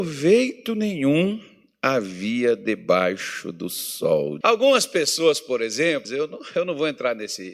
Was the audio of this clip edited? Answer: yes; 2 cuts; at 4.4 s, 6.0 s

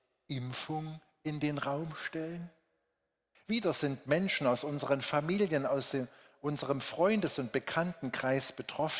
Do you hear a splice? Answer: yes; 1 cut; at 3.3 s

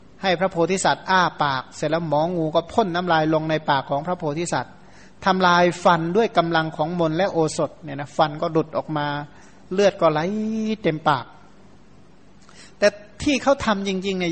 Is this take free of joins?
yes; 0 cuts

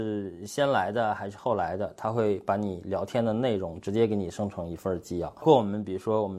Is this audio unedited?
yes; 0 cuts

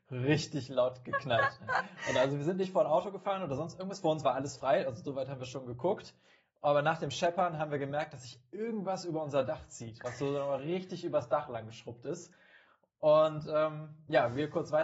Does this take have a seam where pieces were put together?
no; 0 cuts

